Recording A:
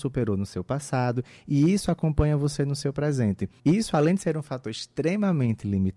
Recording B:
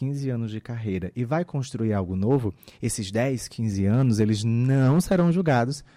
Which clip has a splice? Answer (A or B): A